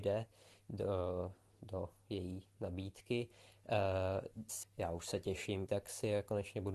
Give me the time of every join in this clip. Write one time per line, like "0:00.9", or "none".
0:04.6
0:05.7